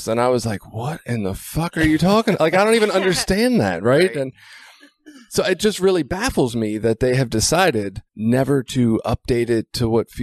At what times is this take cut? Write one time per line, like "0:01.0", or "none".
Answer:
0:08.1